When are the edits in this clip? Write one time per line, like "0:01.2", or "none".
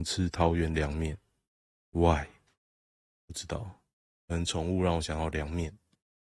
none